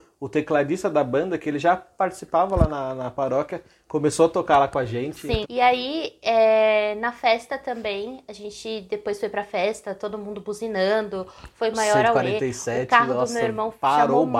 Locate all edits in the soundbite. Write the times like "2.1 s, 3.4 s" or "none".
5.4 s

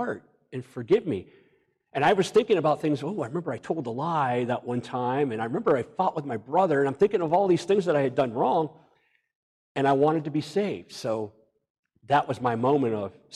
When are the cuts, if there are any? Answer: none

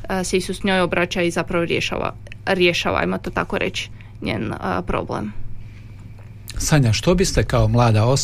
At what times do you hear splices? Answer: none

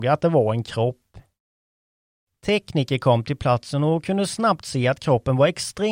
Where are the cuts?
none

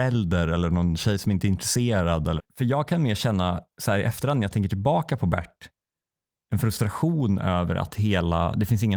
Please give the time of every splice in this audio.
2.4 s

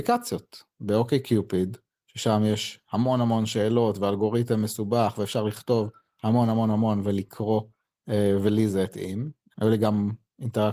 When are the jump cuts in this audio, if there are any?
none

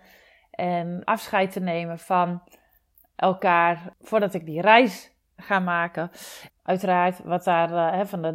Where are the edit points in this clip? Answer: 6.5 s

